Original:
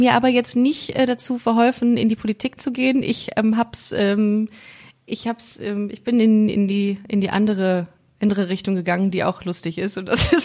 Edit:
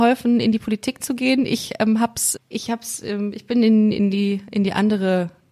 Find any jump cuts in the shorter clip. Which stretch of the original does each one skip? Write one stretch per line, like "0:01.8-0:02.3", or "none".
0:03.9-0:04.9

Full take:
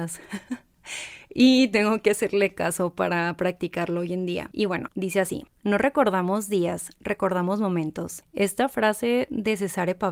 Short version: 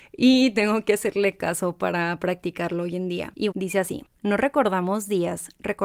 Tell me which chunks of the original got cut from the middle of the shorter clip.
0:04.7-0:04.9

